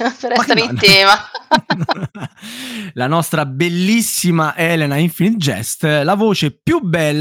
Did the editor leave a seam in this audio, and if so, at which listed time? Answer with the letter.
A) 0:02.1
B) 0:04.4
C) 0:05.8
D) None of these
D